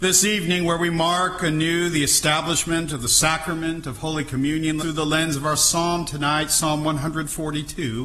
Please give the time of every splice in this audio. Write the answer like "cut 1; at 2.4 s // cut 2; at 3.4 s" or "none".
cut 1; at 4.8 s